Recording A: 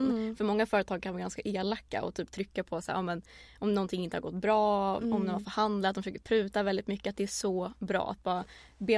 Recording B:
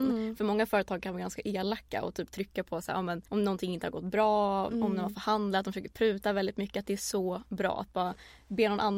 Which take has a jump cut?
B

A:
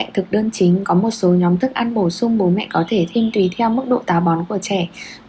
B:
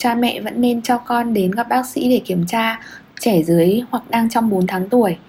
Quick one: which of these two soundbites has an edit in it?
B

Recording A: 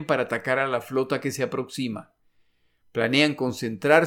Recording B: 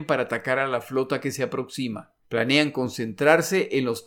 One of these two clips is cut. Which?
B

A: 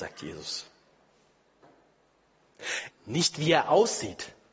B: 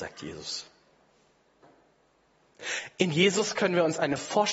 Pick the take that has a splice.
A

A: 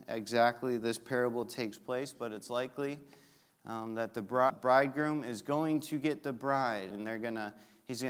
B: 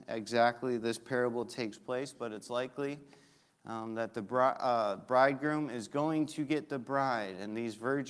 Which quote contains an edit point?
A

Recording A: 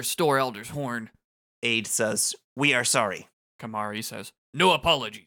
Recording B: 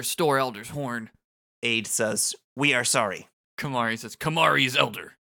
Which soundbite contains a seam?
B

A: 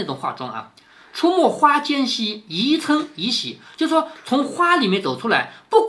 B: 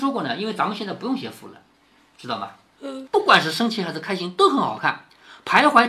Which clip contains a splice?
B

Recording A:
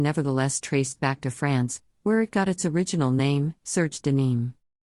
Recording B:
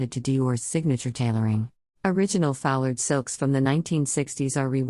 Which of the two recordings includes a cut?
B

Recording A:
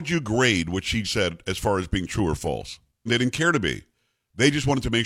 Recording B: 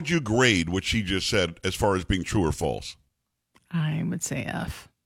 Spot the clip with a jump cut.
A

